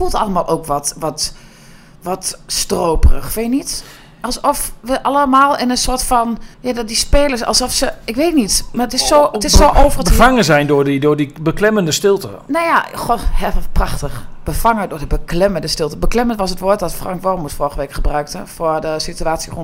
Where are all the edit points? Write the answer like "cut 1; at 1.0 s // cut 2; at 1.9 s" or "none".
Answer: cut 1; at 6.5 s